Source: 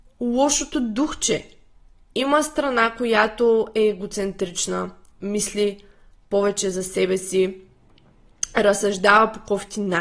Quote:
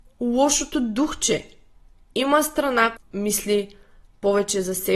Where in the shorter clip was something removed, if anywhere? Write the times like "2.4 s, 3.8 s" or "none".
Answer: 3.0 s